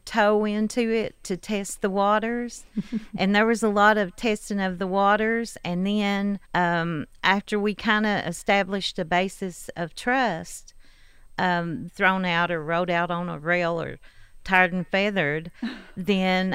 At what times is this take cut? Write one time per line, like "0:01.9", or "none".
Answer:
0:06.4
0:11.9